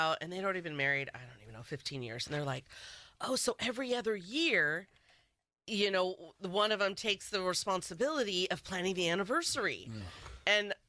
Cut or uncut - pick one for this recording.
uncut